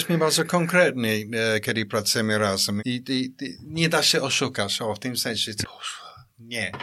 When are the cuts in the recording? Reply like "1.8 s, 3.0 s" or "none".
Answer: 2.8 s, 5.6 s